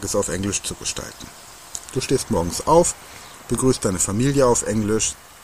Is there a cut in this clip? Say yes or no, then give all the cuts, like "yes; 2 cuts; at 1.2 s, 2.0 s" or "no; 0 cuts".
yes; 1 cut; at 1.9 s